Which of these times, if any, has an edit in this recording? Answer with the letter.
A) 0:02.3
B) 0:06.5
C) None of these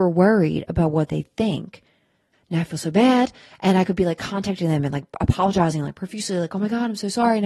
A